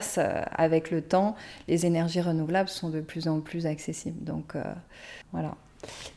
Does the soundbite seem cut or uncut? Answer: cut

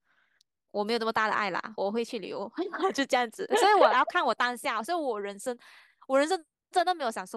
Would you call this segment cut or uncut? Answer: cut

